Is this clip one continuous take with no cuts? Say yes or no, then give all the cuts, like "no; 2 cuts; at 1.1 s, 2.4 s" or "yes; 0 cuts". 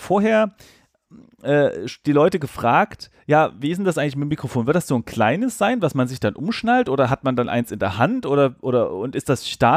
yes; 0 cuts